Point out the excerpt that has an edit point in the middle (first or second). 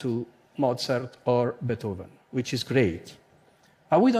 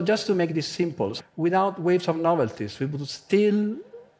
second